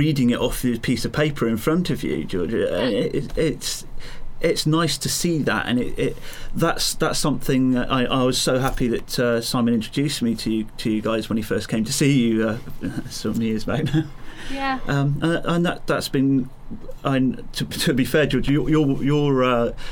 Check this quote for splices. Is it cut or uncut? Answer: uncut